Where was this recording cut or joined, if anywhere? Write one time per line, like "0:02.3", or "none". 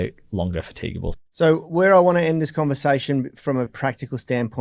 0:01.1
0:03.7